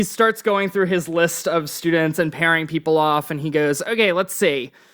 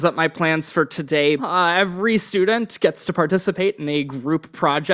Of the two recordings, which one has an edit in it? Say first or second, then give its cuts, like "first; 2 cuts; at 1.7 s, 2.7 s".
second; 1 cut; at 1.4 s